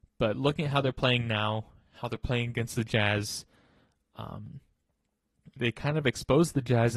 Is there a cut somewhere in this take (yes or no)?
yes